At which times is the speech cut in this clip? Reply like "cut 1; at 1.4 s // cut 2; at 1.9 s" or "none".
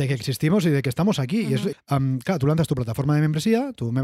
cut 1; at 1.7 s